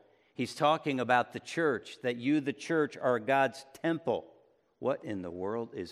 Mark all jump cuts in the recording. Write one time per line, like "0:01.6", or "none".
0:04.7